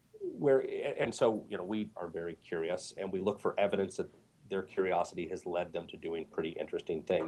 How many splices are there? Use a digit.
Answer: 2